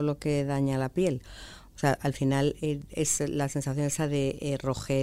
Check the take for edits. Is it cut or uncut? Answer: uncut